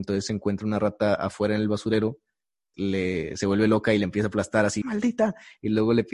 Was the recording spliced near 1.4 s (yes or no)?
no